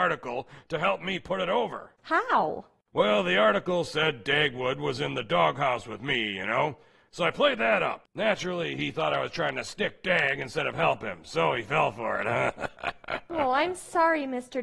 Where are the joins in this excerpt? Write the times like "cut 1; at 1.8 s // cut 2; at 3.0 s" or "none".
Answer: cut 1; at 8.0 s

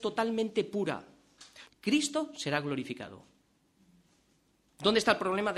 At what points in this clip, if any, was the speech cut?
cut 1; at 1.7 s

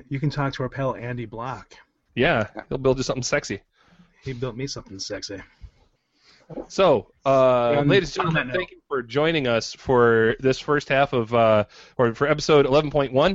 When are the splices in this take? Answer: none

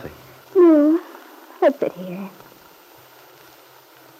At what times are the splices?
cut 1; at 1.8 s

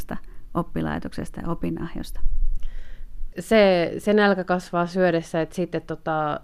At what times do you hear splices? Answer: cut 1; at 3.3 s

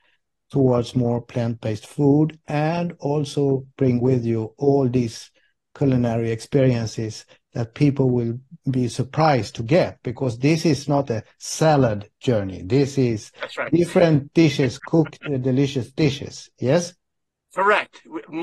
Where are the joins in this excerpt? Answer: none

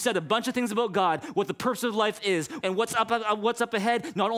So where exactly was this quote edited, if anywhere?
cut 1; at 2.6 s

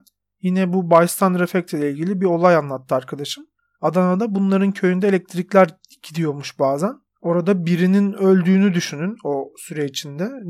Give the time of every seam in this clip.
cut 1; at 7.1 s

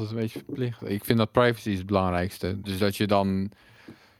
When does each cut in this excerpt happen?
cut 1; at 2.6 s

